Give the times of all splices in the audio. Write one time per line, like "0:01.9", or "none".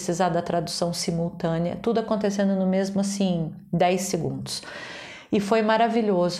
none

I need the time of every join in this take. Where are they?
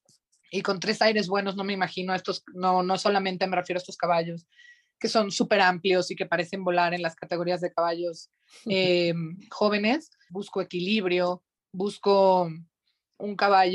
0:10.3

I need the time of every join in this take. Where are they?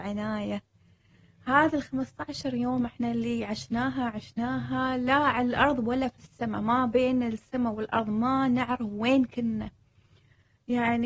none

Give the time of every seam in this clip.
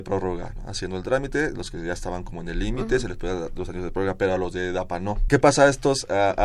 0:05.3

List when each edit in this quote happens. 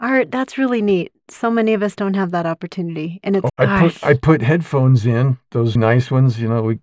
0:03.5
0:05.8

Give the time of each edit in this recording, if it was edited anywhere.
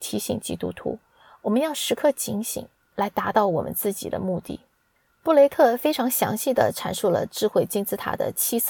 0:02.8

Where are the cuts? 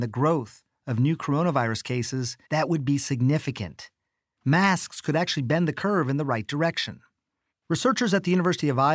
0:02.4
0:07.5

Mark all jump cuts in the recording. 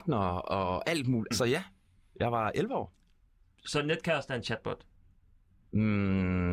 0:01.3

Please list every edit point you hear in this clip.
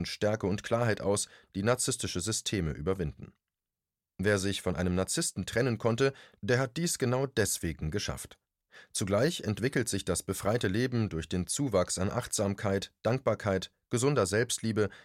none

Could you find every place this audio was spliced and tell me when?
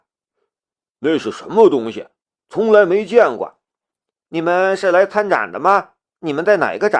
0:04.1

